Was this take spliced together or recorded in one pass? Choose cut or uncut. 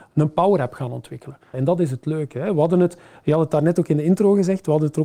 cut